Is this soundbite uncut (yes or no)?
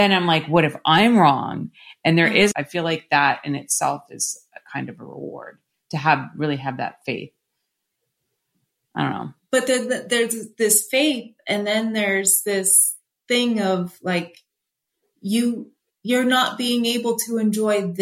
no